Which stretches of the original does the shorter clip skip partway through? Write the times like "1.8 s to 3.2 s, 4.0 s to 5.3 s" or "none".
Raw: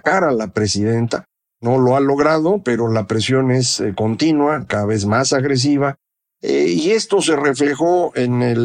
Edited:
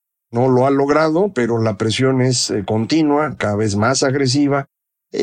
none